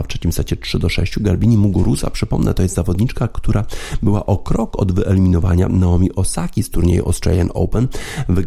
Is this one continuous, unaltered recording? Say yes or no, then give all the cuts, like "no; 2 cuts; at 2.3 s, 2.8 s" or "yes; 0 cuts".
yes; 0 cuts